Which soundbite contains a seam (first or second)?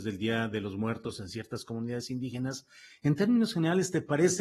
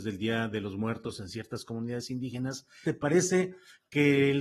second